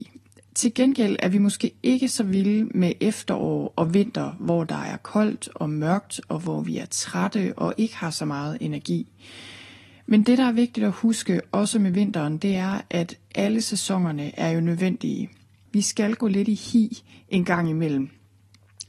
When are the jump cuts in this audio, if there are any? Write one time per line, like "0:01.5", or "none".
0:15.7